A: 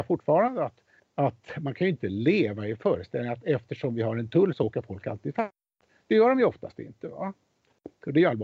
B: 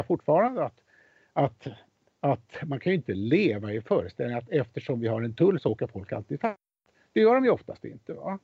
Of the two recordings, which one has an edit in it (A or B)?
A